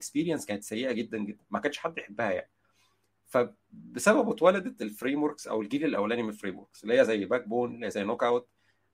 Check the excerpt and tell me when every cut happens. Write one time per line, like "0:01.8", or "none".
0:01.1